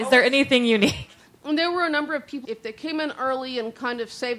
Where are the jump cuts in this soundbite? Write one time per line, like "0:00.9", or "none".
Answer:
0:01.3
0:02.4